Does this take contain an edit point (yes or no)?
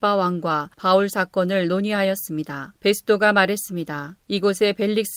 no